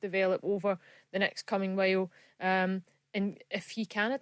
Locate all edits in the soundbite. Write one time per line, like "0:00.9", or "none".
none